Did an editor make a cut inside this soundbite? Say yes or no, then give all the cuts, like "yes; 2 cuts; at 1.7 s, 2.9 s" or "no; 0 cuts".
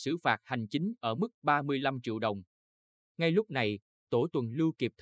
yes; 1 cut; at 2.9 s